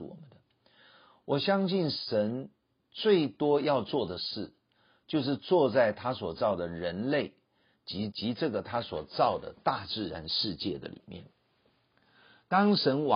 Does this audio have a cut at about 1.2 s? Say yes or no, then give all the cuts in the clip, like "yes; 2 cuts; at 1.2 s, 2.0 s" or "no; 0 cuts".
no; 1 cut; at 8.1 s